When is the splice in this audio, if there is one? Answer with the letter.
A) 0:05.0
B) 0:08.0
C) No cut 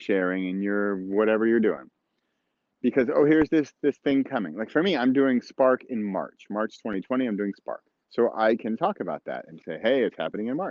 B